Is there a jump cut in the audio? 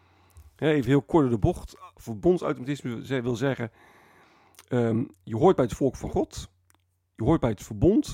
no; 0 cuts

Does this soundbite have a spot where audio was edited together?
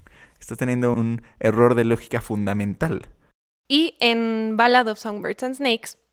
yes; 2 cuts; at 0.9 s, 3.7 s

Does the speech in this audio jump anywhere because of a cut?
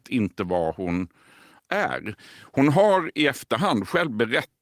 no; 0 cuts

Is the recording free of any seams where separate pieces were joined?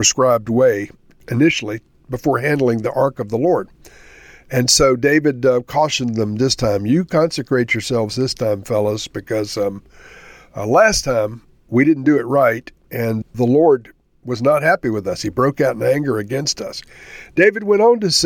yes; 0 cuts

